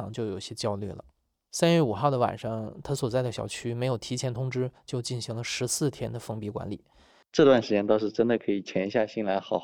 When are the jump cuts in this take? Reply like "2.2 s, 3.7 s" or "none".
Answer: 7.2 s